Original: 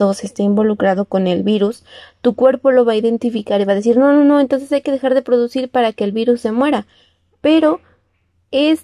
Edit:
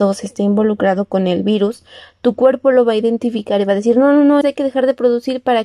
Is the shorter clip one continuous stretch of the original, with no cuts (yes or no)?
no